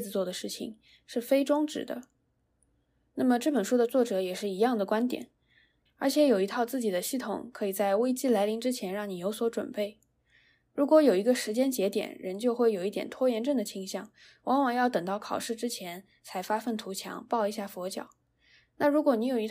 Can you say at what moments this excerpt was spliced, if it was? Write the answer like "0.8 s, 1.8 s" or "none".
5.9 s